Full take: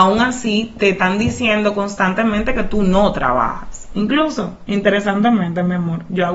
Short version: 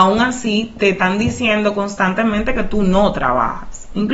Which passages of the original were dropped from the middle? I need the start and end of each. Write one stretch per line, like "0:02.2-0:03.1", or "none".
none